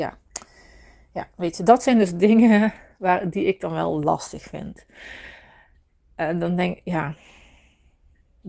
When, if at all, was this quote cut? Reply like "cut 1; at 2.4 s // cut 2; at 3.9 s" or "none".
none